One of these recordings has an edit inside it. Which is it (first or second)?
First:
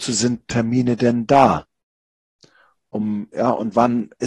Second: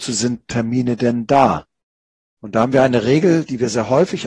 second